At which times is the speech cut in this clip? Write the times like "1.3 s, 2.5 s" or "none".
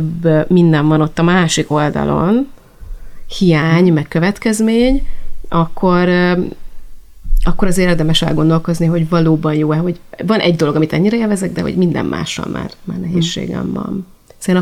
none